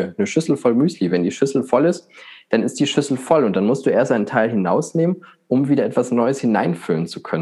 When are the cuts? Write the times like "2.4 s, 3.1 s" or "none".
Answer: none